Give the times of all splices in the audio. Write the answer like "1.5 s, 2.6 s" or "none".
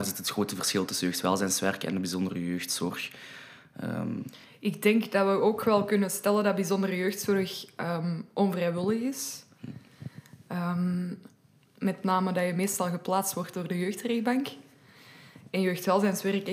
none